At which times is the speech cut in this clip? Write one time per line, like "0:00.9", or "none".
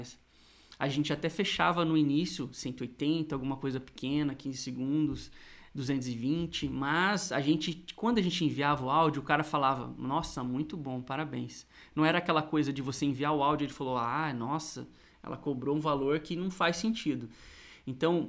none